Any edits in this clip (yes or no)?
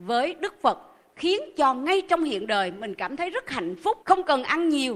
yes